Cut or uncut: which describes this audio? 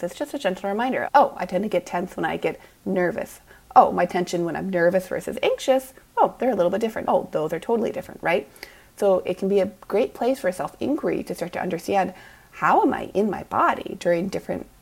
cut